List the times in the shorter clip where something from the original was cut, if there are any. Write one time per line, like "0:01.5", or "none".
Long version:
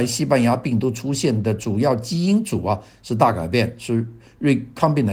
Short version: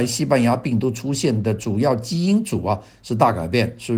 none